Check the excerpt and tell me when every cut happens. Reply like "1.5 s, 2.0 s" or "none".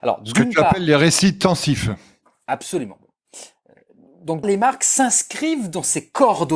4.4 s